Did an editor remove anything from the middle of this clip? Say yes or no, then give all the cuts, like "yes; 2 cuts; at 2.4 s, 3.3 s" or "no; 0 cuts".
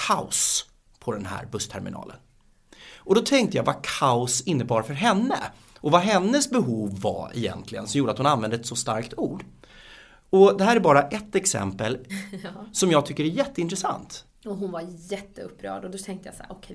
yes; 2 cuts; at 12.1 s, 14.3 s